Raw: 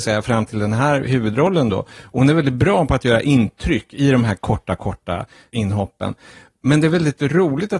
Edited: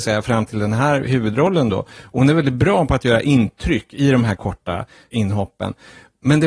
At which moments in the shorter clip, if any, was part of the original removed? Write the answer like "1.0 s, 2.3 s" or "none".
4.4 s